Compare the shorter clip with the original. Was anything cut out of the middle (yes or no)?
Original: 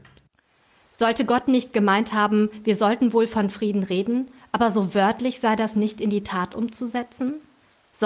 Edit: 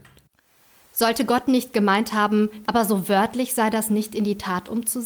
yes